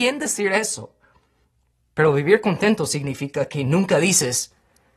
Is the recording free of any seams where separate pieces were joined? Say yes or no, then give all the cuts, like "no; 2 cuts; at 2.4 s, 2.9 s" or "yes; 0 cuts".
no; 1 cut; at 1.7 s